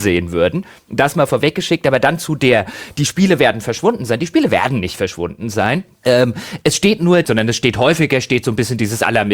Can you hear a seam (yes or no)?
yes